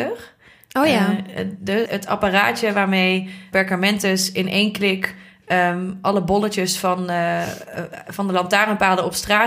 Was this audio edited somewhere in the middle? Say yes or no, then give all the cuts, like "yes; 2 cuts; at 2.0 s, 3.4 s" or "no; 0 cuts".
yes; 2 cuts; at 1.9 s, 3.5 s